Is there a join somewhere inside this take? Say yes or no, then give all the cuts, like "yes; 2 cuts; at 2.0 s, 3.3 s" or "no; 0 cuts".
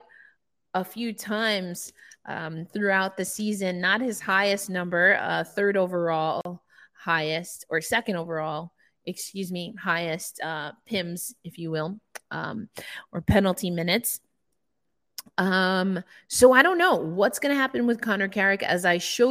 no; 0 cuts